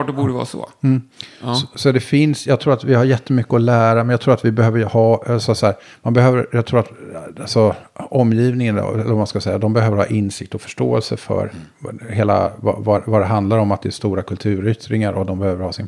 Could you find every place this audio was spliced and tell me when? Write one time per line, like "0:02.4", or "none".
none